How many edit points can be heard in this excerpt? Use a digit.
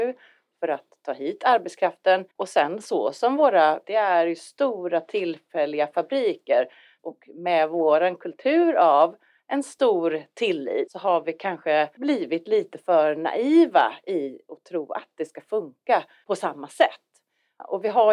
2